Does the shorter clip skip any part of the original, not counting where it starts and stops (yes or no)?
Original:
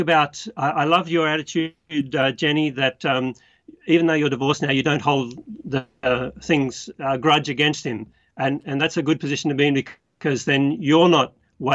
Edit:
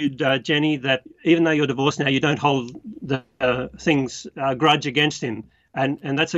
yes